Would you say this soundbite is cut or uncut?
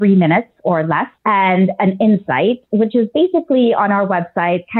cut